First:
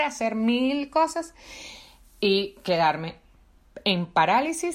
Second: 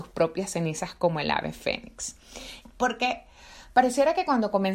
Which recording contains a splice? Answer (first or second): second